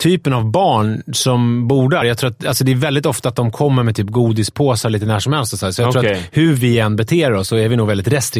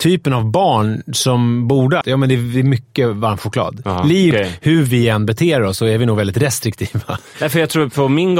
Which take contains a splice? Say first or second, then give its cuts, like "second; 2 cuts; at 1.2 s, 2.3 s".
second; 2 cuts; at 2.0 s, 4.3 s